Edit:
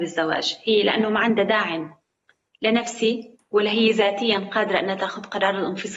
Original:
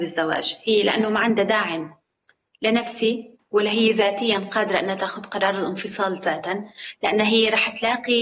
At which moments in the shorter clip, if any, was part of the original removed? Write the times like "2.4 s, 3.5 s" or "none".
none